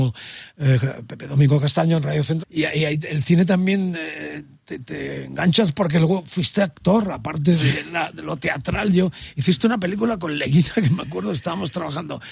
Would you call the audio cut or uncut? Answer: cut